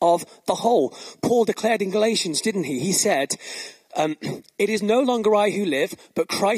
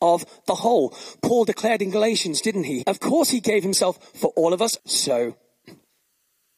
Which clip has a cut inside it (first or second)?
second